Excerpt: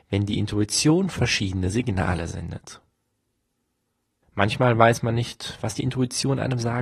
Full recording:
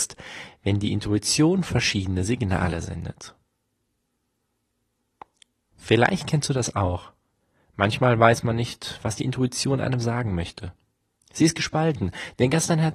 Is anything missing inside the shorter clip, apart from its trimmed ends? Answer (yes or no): yes